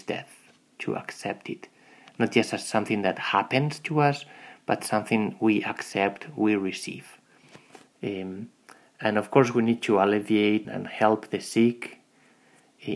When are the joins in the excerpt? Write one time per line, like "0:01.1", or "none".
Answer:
0:07.9
0:10.6